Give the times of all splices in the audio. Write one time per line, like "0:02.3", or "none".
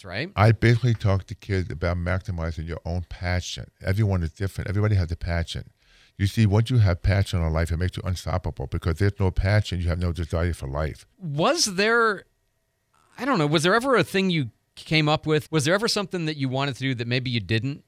0:11.1
0:15.4

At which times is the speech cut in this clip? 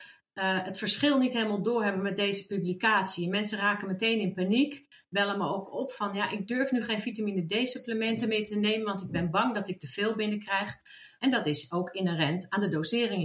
0:11.2

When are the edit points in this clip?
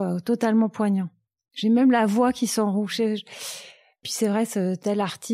none

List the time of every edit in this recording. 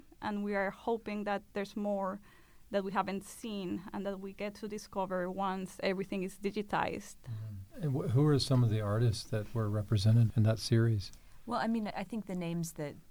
0:11.9

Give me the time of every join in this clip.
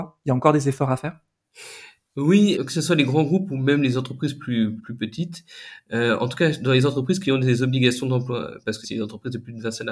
0:02.5
0:04.8
0:08.8

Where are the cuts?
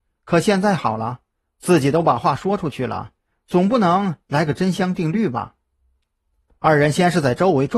0:06.6

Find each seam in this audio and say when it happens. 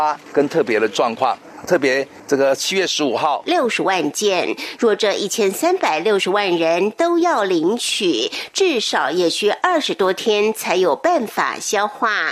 0:03.5

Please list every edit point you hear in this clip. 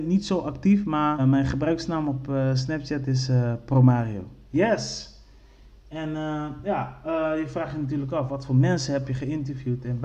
0:01.2

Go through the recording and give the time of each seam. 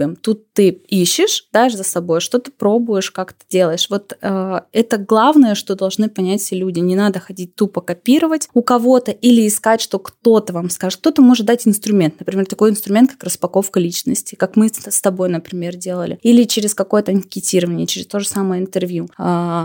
0:01.5

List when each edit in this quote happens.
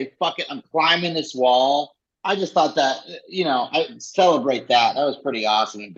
none

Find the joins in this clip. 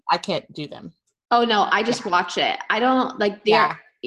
none

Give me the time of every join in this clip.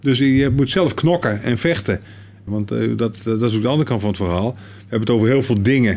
0:02.5

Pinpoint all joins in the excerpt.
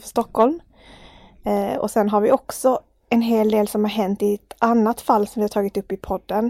none

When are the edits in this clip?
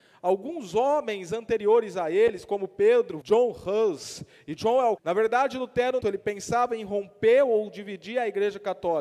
0:03.2
0:05.0
0:06.0

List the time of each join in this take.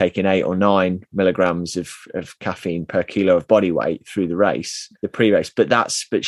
0:04.9

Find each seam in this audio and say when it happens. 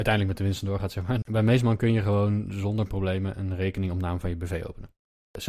0:01.2

